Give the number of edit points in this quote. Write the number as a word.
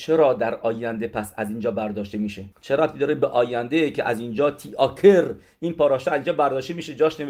one